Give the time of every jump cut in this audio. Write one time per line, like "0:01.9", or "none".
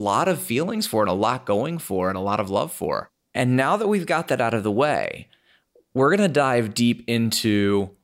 0:03.2